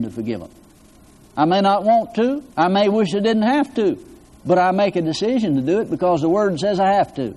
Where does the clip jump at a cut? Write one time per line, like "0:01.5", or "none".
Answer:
0:02.5